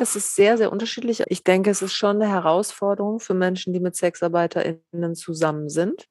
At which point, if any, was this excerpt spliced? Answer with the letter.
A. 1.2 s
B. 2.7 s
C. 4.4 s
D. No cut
A